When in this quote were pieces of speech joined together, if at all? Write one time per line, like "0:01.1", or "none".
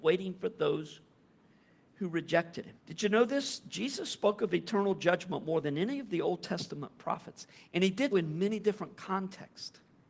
0:02.8
0:08.1

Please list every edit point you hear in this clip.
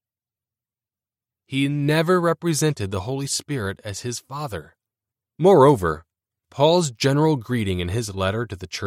0:01.3
0:05.2

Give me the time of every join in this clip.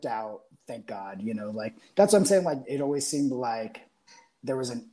0:02.6

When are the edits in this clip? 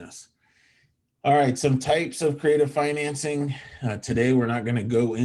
none

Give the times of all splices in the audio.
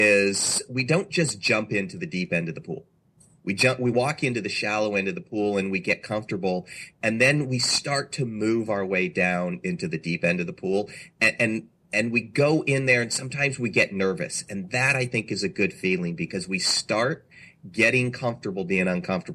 0:09.6

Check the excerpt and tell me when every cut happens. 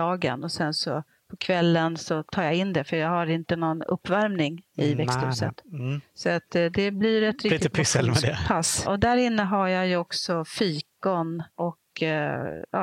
0:08.9
0:11.5

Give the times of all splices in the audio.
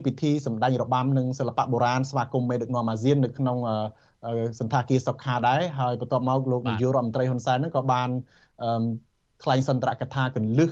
none

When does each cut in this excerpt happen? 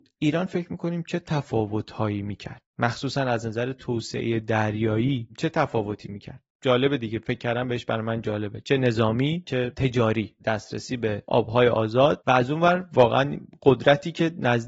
0:02.7
0:06.5

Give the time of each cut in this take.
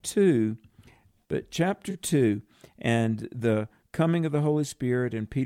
0:01.2

